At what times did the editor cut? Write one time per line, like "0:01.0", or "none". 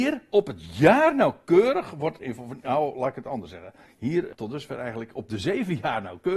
0:04.3

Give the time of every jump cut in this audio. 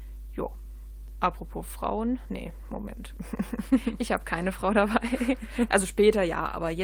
none

